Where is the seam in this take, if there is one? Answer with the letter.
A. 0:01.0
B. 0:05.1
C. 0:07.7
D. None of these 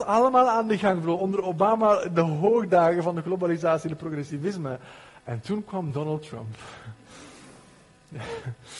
D